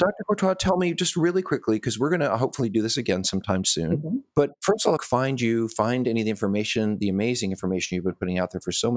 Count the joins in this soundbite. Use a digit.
1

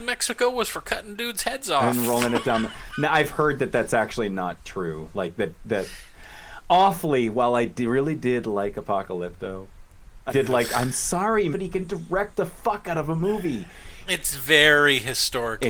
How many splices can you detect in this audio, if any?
3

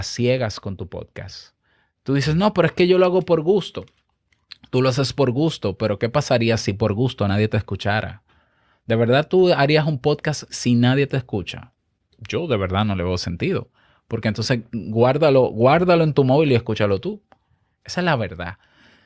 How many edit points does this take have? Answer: 2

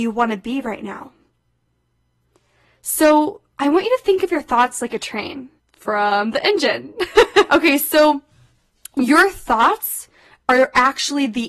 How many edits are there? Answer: 2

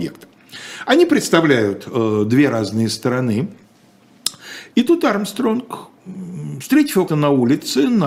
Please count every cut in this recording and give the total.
2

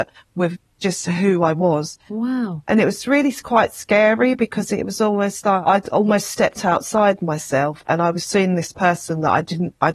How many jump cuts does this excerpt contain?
1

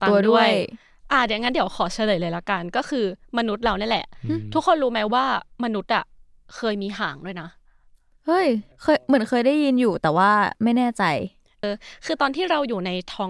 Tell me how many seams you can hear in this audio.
2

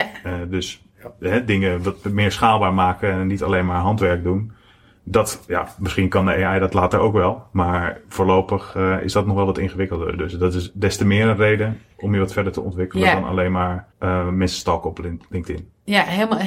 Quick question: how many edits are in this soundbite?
1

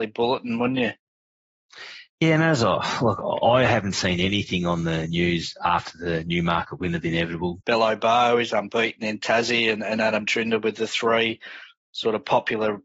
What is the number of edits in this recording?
1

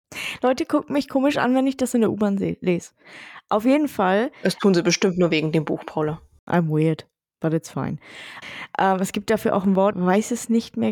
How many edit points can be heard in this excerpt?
2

